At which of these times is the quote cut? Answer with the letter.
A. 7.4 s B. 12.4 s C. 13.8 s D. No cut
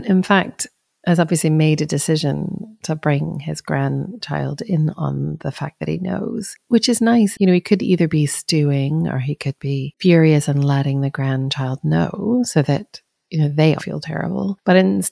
C